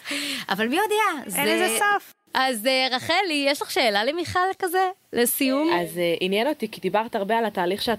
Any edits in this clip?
no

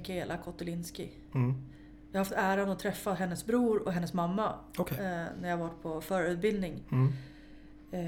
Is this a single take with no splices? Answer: yes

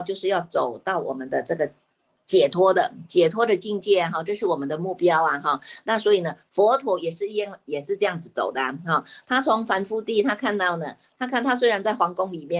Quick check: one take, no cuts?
yes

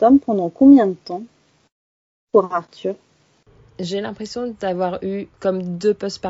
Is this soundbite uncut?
no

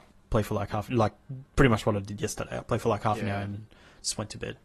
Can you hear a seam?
no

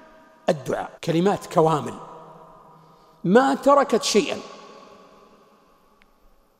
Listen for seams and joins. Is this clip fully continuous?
no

